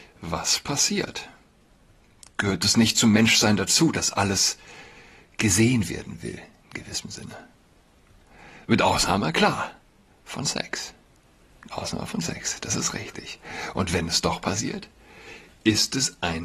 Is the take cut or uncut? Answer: uncut